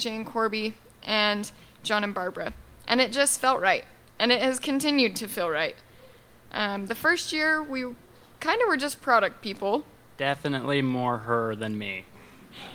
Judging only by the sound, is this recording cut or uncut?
uncut